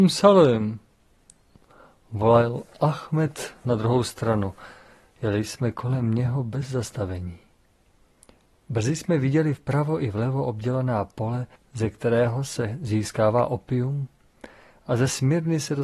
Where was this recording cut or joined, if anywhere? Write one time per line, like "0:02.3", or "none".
0:11.6

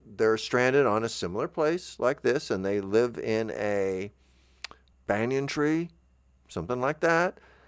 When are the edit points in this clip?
0:04.9

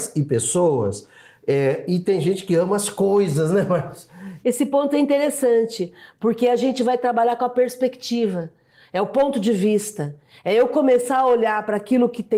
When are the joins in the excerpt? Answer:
0:04.4

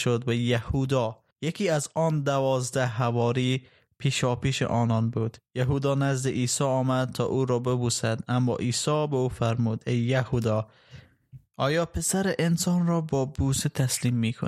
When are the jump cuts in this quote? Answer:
0:01.3
0:05.5

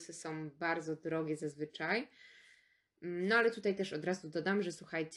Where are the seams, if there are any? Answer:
none

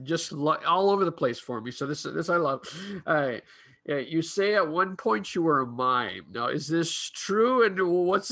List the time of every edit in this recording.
none

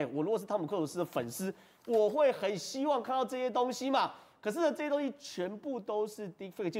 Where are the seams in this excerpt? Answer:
none

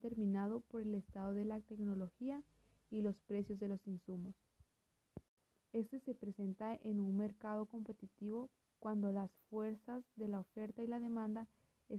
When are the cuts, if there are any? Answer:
0:05.6

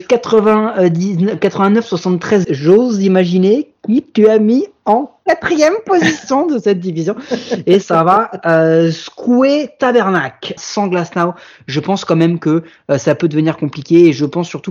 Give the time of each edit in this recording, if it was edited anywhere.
0:02.4
0:10.6

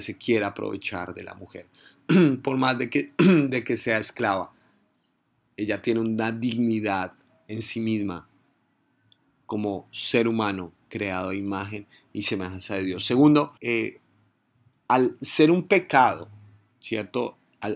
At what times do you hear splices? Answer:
0:13.6

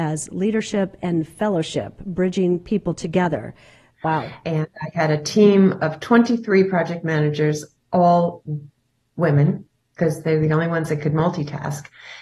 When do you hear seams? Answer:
0:03.9

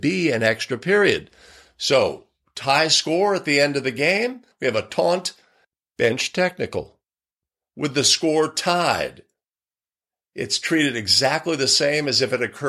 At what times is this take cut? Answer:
0:04.5

